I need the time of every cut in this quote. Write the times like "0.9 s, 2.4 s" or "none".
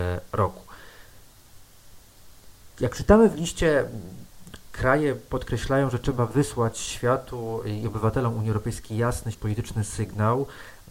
2.7 s, 9.3 s